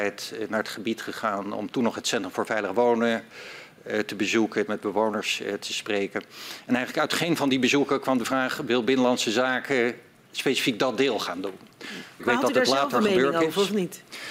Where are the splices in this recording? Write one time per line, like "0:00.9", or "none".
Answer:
0:04.7
0:12.2